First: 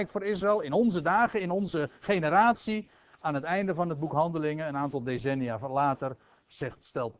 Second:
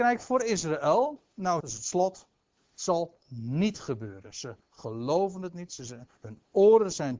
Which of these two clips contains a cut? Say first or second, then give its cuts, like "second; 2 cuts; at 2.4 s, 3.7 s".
second; 1 cut; at 1.6 s